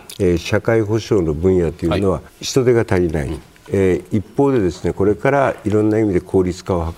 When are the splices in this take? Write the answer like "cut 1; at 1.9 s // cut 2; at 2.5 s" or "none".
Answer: cut 1; at 2.3 s